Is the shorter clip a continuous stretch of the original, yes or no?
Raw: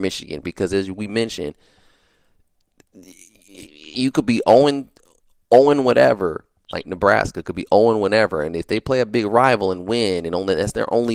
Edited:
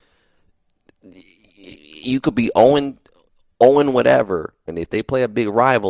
no